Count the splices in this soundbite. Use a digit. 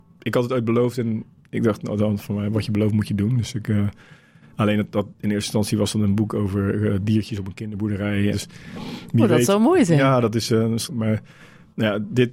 2